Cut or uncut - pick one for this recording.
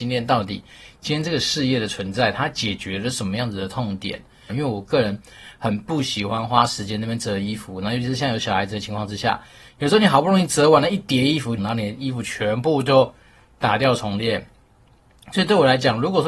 cut